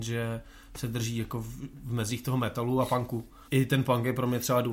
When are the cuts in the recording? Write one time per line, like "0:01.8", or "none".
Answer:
0:03.4